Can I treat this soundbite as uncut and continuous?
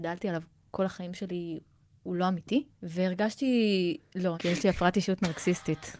no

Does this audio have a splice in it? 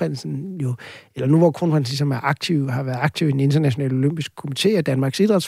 no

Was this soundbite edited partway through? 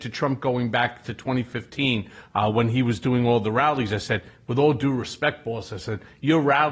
no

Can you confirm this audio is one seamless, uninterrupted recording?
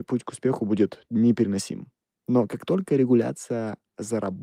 yes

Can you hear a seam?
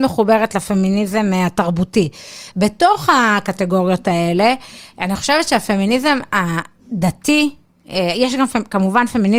yes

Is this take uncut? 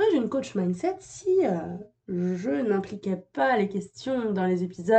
yes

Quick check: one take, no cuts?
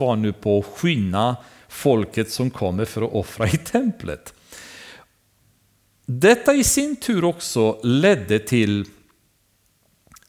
yes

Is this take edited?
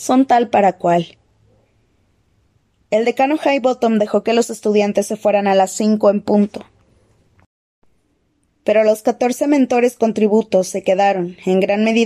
no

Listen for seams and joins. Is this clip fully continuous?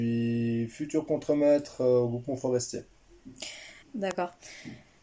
no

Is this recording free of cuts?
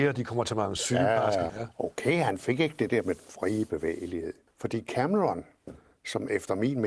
no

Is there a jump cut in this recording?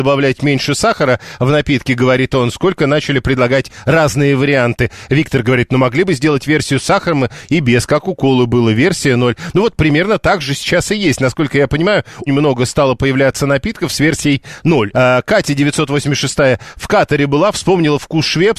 yes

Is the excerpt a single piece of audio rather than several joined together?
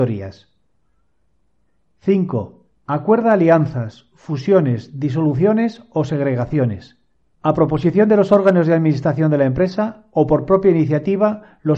yes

